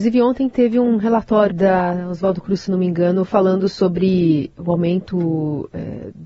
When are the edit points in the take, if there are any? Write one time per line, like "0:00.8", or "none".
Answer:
0:01.5